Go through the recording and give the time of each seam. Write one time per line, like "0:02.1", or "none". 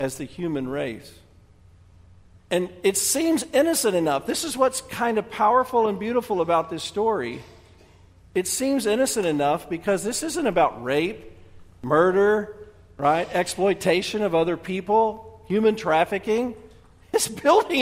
none